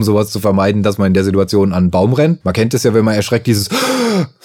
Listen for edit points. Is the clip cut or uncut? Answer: cut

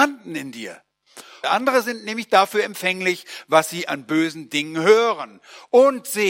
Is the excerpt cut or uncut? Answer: cut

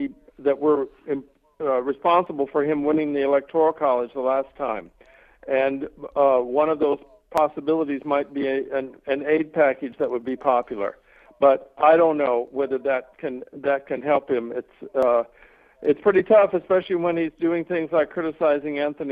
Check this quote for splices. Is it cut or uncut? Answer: uncut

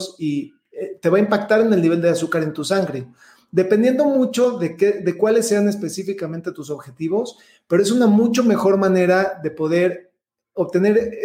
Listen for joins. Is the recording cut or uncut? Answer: uncut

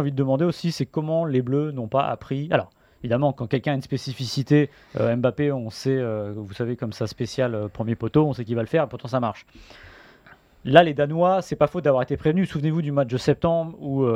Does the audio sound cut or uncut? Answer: uncut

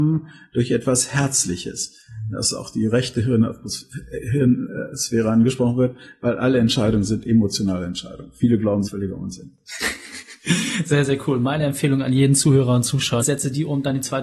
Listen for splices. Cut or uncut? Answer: cut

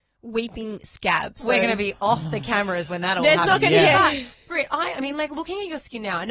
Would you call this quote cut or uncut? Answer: uncut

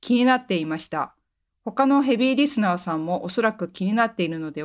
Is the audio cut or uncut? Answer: uncut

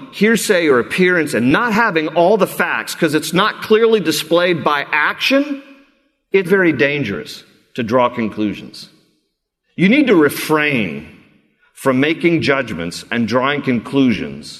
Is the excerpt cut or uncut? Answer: cut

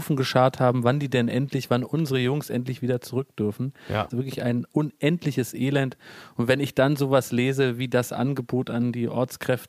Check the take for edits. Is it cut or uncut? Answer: cut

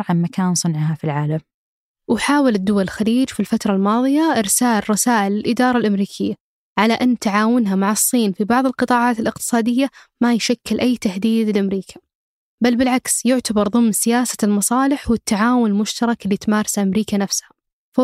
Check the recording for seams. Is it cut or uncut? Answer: uncut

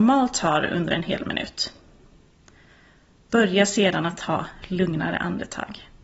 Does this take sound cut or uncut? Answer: uncut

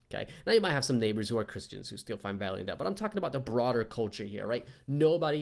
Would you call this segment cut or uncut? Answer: uncut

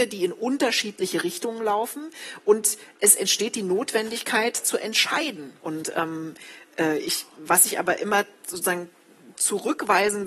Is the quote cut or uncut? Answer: cut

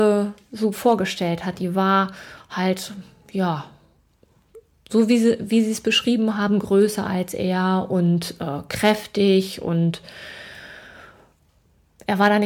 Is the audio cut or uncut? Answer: uncut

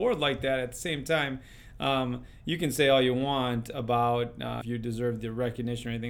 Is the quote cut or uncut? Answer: cut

